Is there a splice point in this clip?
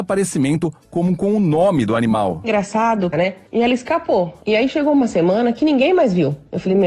yes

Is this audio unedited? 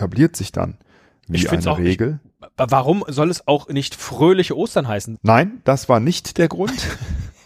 no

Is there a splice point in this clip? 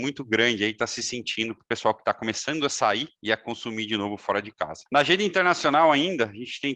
yes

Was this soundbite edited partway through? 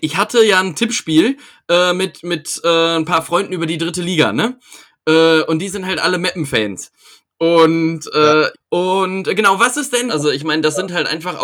yes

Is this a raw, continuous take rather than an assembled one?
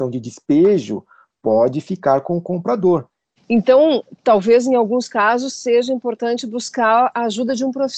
no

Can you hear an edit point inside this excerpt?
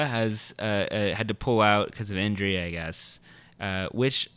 no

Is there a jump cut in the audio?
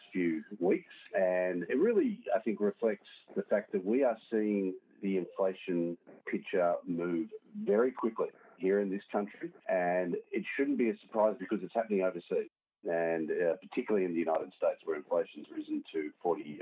no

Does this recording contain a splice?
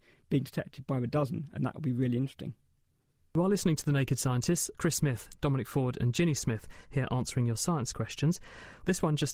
no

